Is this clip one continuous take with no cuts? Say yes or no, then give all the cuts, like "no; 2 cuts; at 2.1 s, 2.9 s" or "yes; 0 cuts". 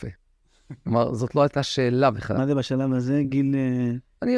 yes; 0 cuts